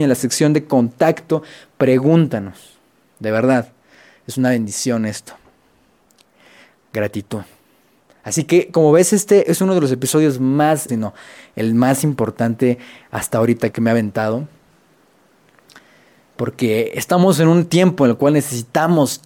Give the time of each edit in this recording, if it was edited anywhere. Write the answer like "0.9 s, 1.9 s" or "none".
10.9 s, 13.7 s